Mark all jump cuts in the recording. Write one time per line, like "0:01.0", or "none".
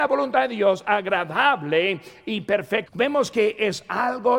0:02.9